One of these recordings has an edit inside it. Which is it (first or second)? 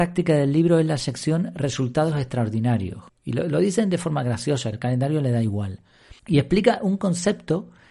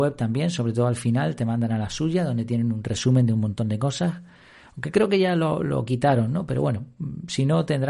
first